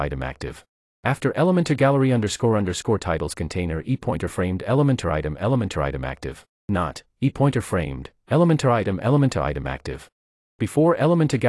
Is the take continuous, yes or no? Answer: no